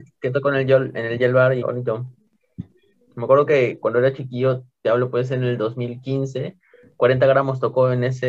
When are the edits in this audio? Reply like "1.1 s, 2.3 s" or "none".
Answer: 1.6 s